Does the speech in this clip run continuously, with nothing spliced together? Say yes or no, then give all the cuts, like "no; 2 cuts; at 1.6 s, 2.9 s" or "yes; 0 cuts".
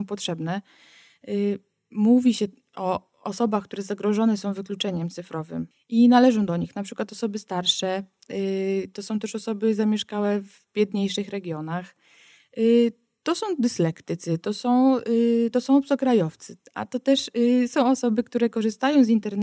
yes; 0 cuts